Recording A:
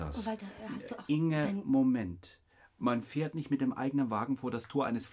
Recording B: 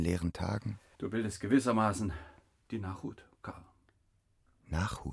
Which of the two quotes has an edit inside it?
B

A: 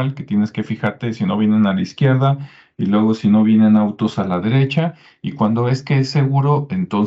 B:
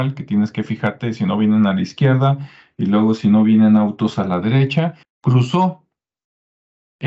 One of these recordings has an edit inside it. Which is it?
B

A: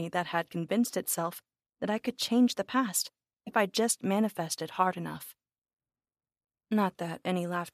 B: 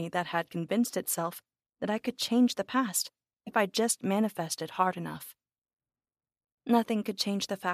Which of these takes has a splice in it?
B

